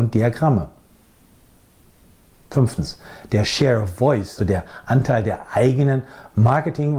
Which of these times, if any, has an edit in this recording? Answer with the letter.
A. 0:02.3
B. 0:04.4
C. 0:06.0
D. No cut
B